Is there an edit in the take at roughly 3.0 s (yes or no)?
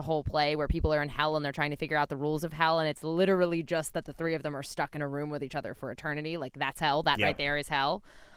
no